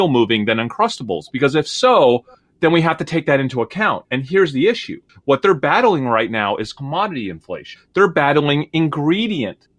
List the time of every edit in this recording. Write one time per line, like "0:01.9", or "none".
none